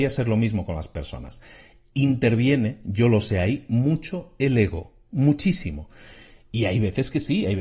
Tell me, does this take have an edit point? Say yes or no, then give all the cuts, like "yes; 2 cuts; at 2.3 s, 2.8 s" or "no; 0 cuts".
no; 0 cuts